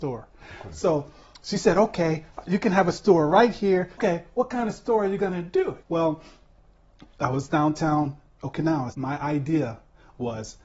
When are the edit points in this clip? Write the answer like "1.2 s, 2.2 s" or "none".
4.0 s, 5.8 s, 8.9 s

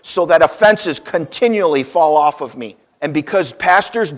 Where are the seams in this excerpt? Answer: 2.8 s

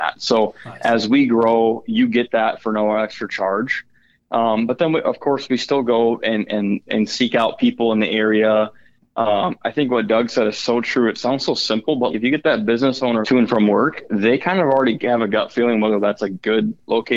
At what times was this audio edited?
12.1 s, 13.2 s

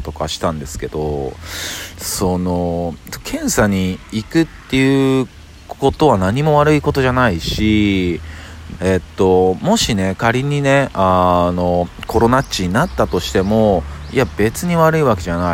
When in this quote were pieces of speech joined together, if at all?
8.8 s

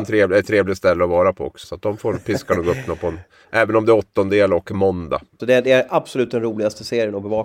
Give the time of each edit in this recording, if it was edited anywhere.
1.6 s, 5.4 s

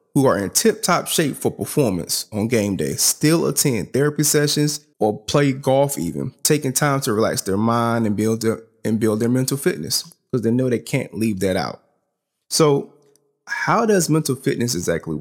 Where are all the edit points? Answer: 4.9 s

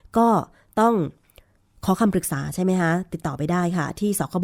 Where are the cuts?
none

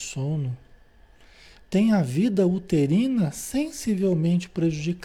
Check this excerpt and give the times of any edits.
none

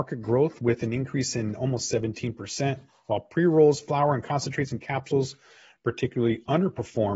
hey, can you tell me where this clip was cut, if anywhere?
none

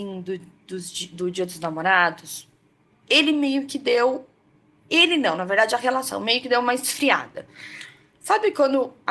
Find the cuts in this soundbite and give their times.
none

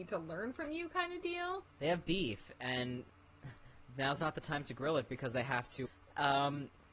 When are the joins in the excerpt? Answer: 1.6 s, 5.9 s

